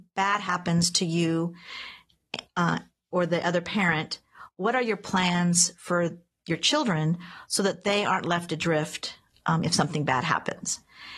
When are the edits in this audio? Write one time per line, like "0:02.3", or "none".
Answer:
none